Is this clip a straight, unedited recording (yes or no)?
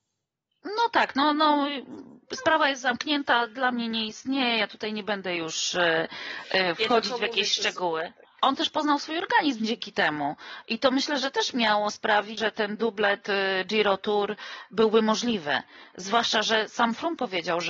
no